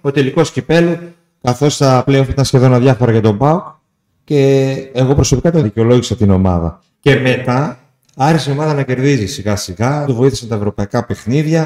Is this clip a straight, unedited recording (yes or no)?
no